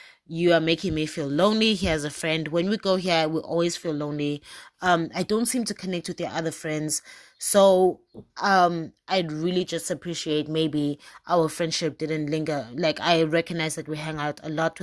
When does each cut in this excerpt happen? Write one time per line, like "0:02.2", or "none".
none